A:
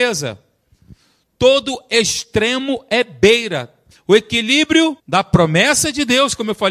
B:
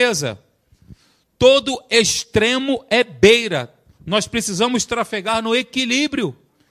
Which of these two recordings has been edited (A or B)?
A